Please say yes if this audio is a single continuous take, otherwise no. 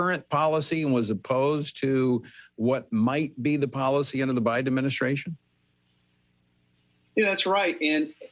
yes